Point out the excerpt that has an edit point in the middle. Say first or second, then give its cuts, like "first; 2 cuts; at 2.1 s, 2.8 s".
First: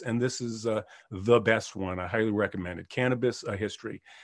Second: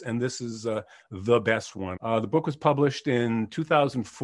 second; 1 cut; at 2.0 s